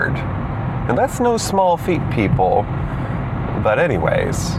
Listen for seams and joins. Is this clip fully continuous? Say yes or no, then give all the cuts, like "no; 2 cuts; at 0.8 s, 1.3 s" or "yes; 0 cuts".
no; 1 cut; at 3.6 s